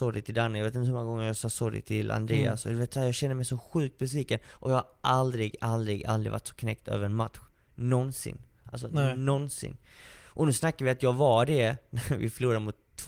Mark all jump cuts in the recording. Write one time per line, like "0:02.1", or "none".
none

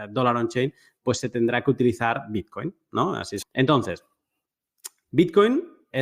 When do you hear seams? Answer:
0:03.4

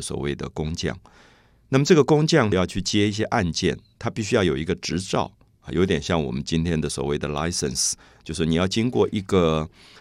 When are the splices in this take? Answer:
0:02.5

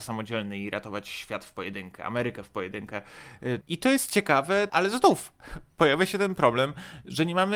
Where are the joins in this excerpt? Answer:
0:03.6
0:04.7

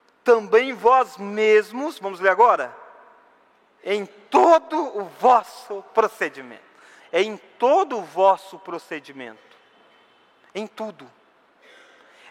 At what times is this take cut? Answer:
0:07.0

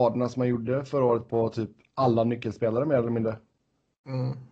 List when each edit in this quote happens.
none

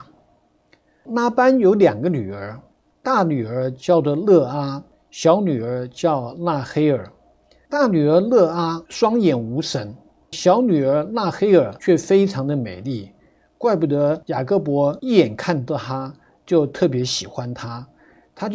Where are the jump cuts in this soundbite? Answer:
0:10.3

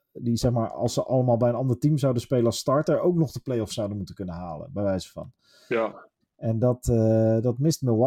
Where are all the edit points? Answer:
0:06.2

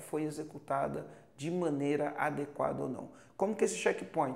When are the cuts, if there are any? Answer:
none

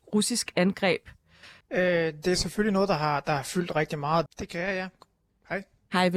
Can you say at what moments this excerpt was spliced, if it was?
0:01.6
0:04.3

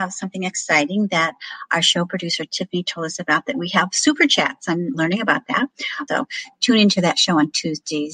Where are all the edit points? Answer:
0:04.9
0:06.1

